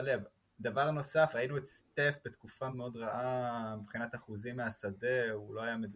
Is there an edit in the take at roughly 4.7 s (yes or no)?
no